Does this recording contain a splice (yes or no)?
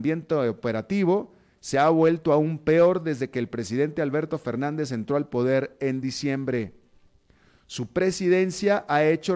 no